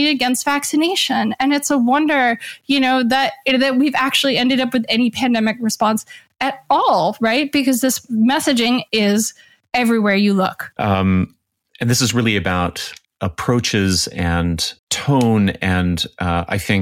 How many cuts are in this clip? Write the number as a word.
three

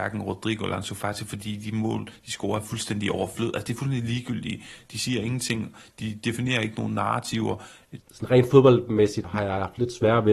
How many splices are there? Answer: two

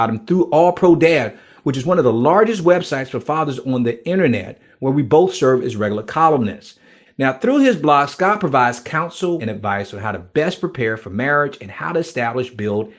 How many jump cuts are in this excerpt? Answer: two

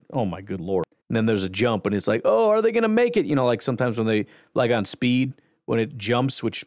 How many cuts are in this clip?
one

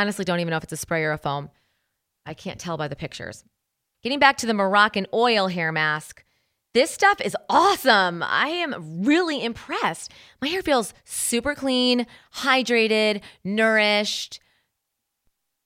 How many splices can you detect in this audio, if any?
zero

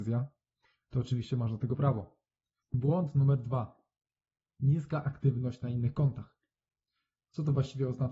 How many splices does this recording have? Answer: one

